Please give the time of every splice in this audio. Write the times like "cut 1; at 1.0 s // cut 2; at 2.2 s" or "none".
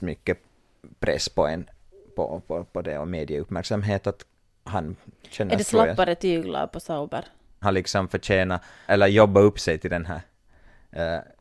cut 1; at 7.6 s // cut 2; at 8.9 s